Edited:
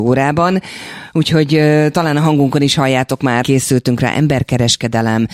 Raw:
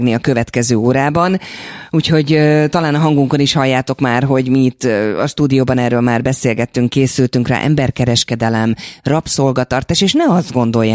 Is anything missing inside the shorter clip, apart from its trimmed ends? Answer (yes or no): yes